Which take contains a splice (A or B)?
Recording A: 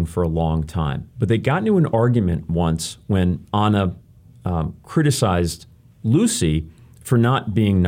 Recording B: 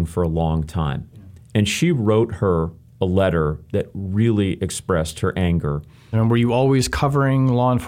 B